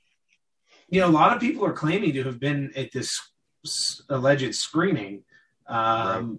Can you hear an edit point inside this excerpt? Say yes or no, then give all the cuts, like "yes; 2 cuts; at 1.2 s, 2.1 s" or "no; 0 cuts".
no; 0 cuts